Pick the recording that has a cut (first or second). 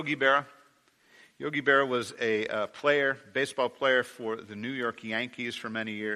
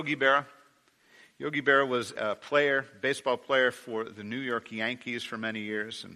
second